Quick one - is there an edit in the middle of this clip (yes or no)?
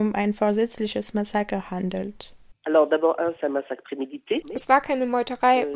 yes